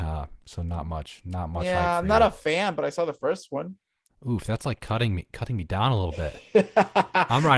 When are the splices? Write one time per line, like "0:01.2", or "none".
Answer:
0:04.1